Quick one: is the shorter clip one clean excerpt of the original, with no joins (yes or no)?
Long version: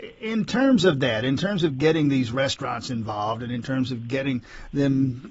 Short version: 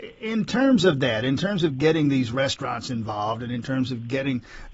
yes